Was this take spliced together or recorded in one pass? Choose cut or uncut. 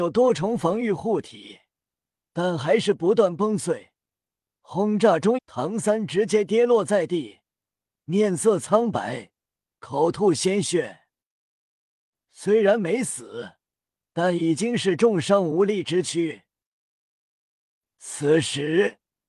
cut